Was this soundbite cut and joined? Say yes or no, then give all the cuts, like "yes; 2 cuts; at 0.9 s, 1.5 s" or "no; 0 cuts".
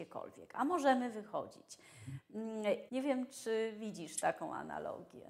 yes; 1 cut; at 2.9 s